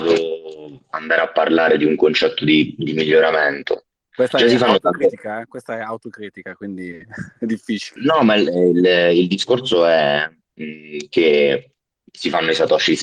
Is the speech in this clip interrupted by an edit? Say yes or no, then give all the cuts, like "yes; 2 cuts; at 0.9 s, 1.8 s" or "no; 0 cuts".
yes; 1 cut; at 8.0 s